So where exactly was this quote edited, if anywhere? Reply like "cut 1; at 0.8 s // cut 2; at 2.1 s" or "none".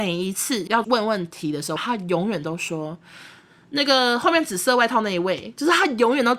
cut 1; at 1.8 s